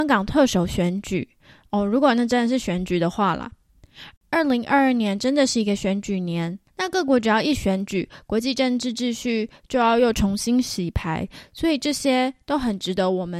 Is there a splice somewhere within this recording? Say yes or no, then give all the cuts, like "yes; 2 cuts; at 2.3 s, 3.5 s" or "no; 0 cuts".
yes; 1 cut; at 4.2 s